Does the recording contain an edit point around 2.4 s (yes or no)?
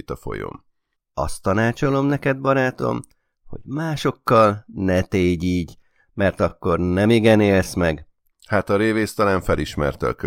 no